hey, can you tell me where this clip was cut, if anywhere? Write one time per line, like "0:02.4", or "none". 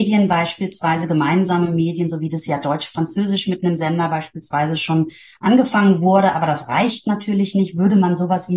none